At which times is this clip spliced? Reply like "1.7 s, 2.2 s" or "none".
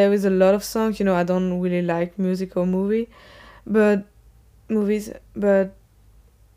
none